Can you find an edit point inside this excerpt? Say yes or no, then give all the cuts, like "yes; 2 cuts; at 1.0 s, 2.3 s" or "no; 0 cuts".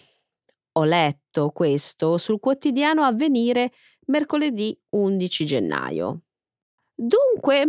yes; 1 cut; at 6.8 s